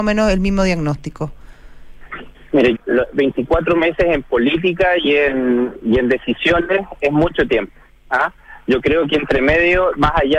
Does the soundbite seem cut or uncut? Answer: cut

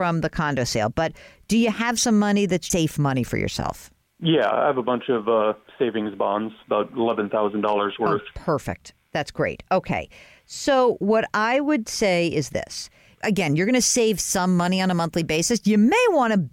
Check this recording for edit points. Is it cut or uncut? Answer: cut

